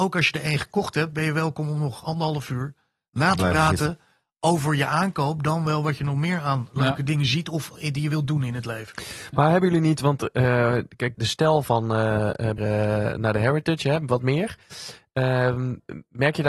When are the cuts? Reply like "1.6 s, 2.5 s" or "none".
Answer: 11.1 s, 12.6 s